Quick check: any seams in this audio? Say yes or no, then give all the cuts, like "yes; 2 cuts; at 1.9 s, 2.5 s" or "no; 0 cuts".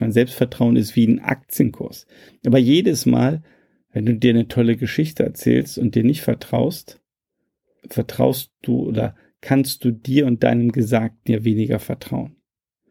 yes; 2 cuts; at 2.3 s, 7.8 s